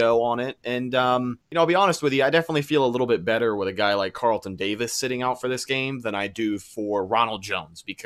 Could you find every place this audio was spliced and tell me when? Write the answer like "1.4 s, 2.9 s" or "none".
1.4 s

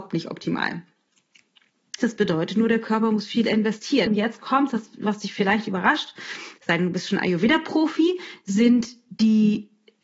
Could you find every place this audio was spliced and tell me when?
2.0 s, 4.1 s

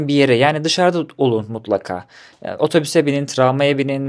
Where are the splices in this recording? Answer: none

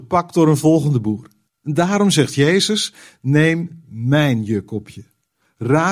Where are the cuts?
1.5 s

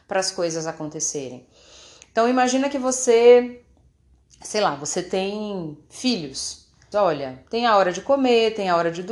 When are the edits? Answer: 6.9 s

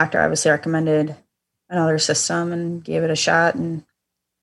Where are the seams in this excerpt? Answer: none

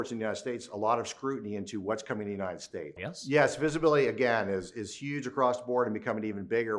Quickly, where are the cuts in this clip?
3.0 s

